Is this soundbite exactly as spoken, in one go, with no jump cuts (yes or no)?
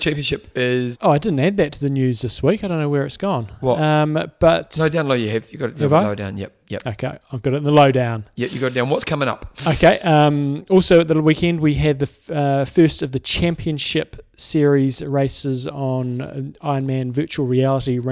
no